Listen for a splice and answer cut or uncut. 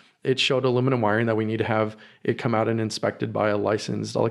uncut